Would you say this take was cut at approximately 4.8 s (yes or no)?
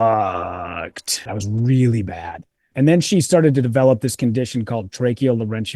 no